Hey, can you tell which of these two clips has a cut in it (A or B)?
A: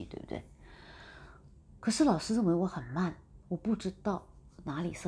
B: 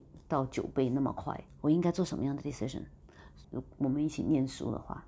B